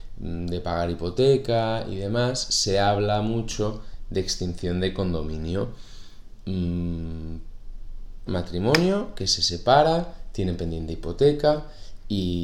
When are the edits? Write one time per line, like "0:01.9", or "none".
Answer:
0:08.3